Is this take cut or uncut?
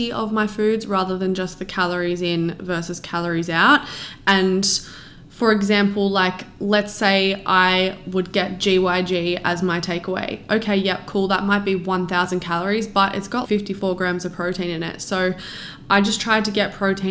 cut